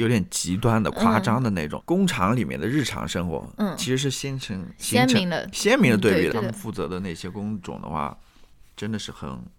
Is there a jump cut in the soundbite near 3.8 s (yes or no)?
no